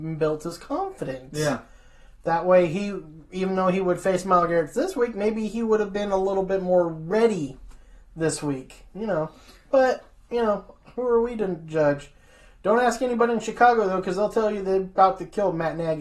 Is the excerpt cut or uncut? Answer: uncut